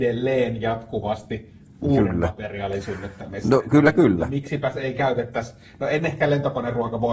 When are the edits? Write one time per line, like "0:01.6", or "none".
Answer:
none

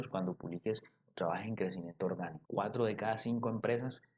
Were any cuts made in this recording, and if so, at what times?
0:02.5

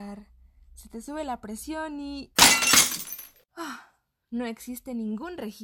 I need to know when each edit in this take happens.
0:03.5

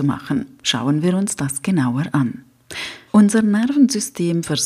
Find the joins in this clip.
0:03.1

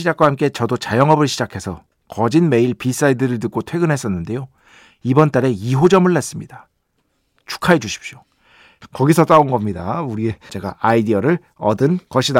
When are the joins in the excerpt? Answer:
0:08.8
0:10.5

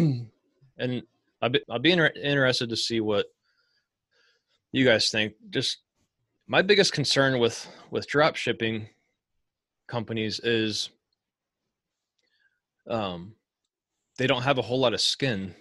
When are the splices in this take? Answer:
0:01.6

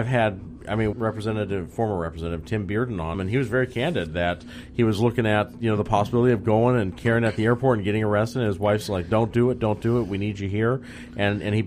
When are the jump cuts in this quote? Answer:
0:00.9
0:03.1

